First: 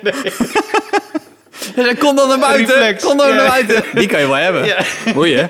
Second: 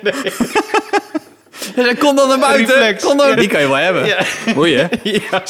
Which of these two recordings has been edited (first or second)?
second